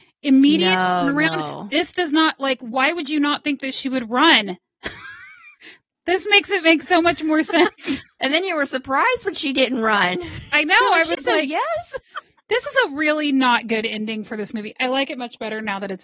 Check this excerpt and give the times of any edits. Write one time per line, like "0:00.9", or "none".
none